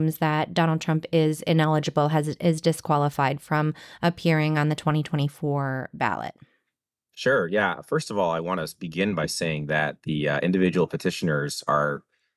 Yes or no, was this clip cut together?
no